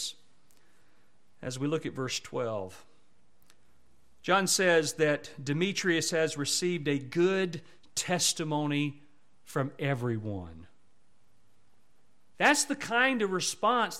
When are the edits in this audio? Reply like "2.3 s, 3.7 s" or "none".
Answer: 12.3 s